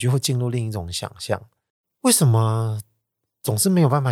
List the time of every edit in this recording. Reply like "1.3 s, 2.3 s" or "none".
none